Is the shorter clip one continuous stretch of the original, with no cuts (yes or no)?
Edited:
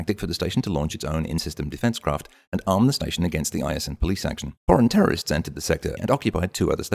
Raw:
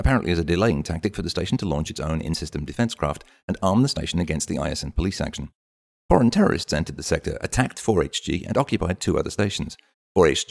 no